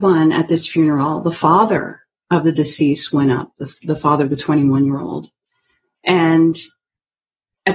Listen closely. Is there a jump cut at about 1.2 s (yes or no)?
no